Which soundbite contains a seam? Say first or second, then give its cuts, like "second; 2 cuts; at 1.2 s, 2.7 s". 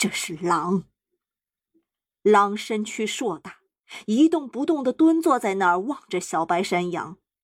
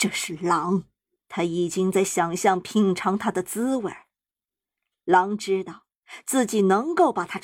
second; 1 cut; at 1.2 s